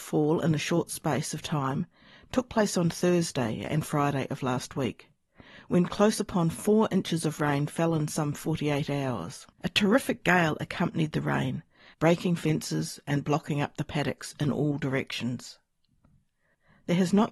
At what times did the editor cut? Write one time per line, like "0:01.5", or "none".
0:09.5
0:11.9

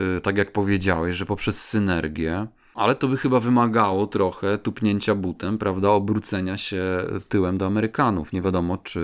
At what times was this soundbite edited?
none

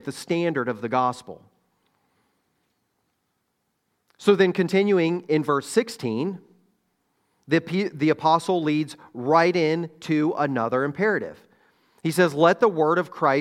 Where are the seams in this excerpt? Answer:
none

